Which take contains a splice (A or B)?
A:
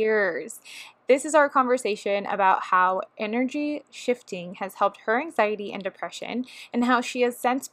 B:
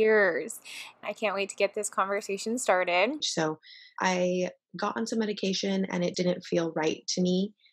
B